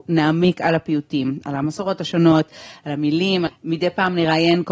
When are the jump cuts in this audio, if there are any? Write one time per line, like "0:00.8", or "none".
0:03.5